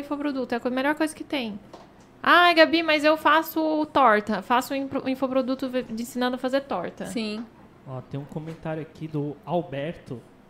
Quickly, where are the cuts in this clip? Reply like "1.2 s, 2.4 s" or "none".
none